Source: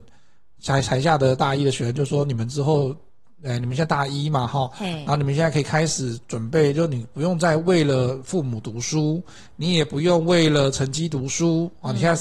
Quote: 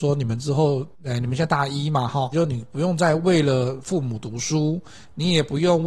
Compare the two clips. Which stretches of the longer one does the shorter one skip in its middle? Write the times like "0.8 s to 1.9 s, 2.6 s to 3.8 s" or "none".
3.0 s to 3.3 s, 4.7 s to 6.7 s